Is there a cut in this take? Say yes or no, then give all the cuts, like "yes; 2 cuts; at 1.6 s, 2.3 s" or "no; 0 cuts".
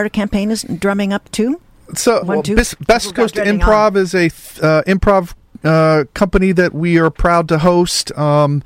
yes; 1 cut; at 2.2 s